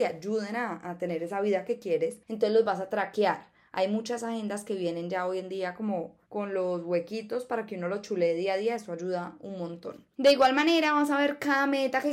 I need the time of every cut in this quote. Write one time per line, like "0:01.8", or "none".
0:06.2